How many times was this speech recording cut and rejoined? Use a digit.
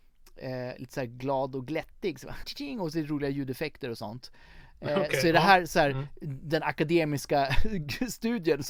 1